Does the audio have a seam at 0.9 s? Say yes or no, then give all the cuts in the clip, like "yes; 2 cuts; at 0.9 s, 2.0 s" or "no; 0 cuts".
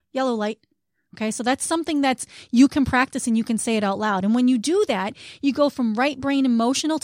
no; 0 cuts